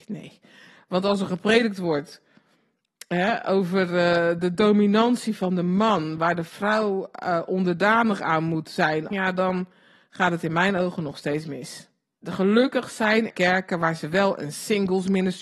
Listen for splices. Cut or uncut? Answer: cut